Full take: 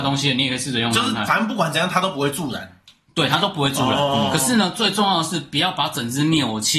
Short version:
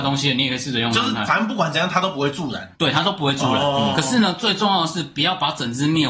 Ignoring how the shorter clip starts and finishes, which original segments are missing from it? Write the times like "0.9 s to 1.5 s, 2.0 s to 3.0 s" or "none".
2.8 s to 3.1 s